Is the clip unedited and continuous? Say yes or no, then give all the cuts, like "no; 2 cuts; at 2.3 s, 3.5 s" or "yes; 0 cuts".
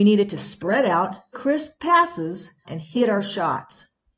no; 2 cuts; at 1.3 s, 2.6 s